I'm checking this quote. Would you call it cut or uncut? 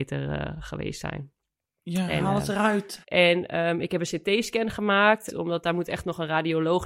cut